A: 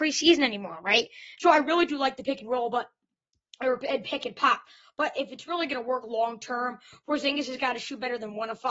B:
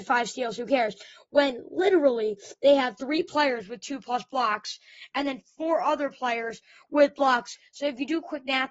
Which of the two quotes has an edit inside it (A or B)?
A